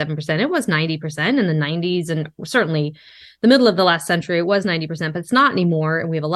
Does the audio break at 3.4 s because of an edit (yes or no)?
no